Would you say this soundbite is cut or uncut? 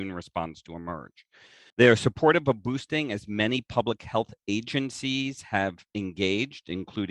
cut